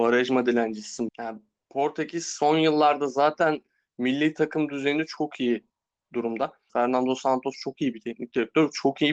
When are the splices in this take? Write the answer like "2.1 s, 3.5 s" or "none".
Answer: 1.1 s, 6.7 s